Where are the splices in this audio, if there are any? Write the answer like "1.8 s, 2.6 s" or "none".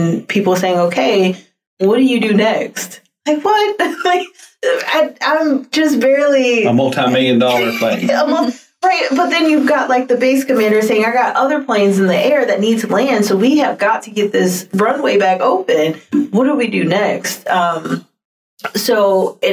none